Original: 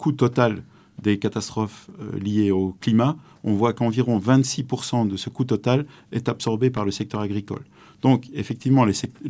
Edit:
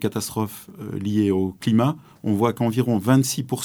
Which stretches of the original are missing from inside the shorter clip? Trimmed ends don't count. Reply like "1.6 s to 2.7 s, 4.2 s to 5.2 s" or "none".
none

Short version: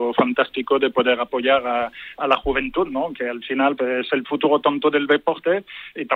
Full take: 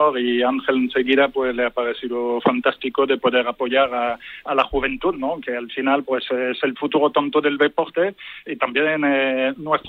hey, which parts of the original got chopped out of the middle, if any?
6.0 s to 6.3 s

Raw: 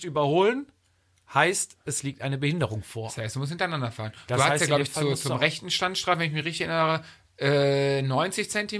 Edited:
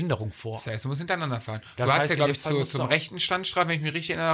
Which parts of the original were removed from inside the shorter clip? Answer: none

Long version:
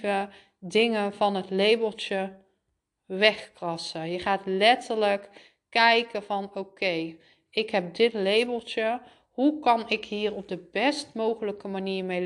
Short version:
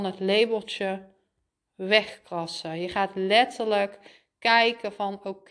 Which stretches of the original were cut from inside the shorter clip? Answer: none

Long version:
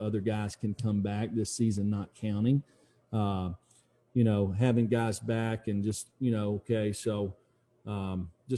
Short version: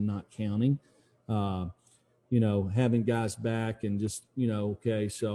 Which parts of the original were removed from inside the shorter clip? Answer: none

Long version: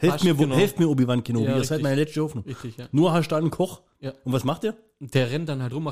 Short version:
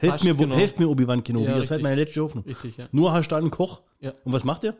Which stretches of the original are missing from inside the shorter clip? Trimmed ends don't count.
none

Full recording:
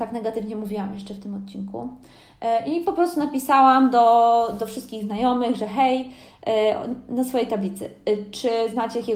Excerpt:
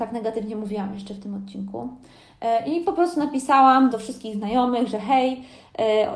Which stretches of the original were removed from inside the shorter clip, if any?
3.9 s to 4.6 s

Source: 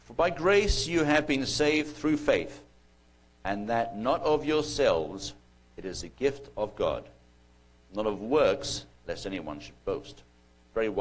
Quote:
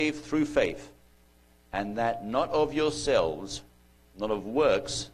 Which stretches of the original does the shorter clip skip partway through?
5.7 s to 7.7 s

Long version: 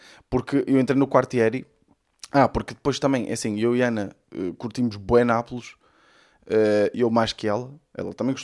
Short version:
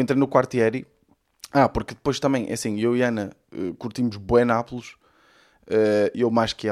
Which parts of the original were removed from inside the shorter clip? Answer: none

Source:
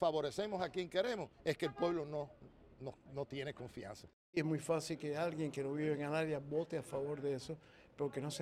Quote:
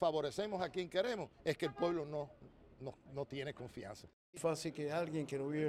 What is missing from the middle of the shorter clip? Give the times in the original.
4.4 s to 4.6 s

